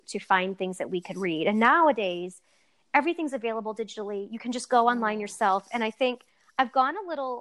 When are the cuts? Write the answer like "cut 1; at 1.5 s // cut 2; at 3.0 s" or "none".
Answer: none